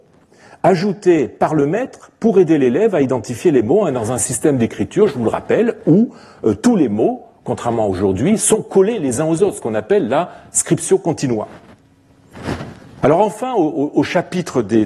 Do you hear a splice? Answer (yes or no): yes